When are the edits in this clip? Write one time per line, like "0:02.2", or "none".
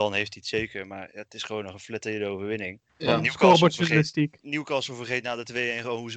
0:02.9
0:04.4